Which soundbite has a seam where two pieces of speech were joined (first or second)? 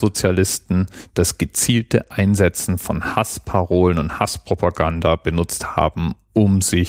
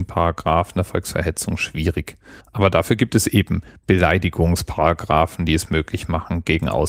second